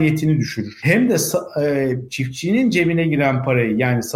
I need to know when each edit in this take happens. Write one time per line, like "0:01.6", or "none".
none